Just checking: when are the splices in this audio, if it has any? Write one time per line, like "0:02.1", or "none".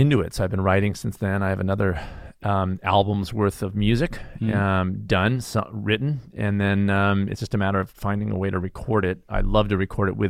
none